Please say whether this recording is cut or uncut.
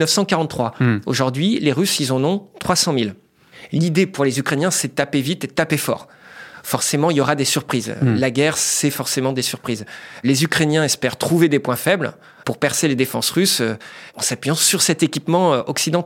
uncut